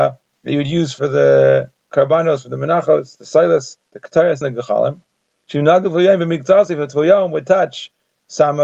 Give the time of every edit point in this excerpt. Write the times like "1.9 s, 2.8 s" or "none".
4.4 s